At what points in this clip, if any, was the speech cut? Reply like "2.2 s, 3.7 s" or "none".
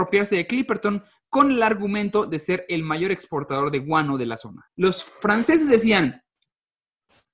4.7 s